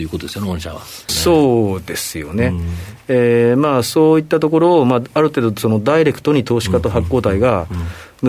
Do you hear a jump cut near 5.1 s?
no; 1 cut; at 1.1 s

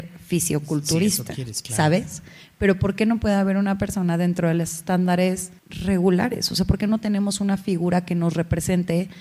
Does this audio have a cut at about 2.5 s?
no; 1 cut; at 5.6 s

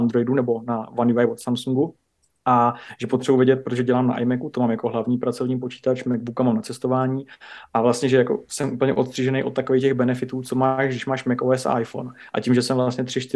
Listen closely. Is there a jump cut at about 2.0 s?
no; 0 cuts

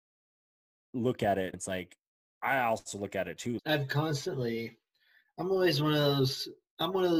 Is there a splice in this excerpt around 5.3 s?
no; 2 cuts; at 1.5 s, 3.6 s

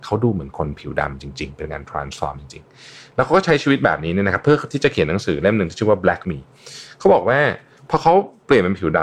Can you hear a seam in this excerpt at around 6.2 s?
yes; 1 cut; at 6.2 s

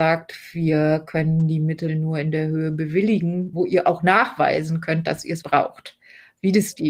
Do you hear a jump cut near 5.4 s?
yes; 1 cut; at 5.4 s

